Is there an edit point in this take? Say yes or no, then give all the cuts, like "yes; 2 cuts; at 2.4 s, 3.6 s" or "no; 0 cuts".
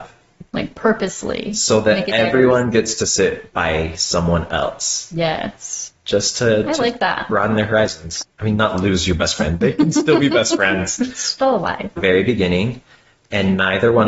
yes; 2 cuts; at 8.2 s, 12.0 s